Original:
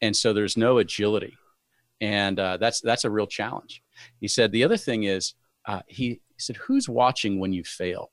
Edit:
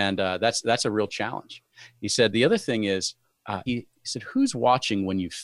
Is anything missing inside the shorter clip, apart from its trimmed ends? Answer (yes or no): yes